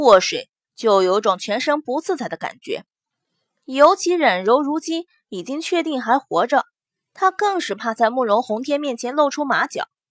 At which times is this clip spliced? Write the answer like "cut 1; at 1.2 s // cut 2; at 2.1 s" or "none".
none